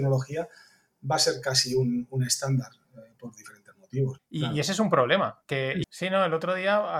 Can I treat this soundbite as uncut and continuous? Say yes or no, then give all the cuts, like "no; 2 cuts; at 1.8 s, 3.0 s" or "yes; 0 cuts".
no; 2 cuts; at 4.2 s, 5.8 s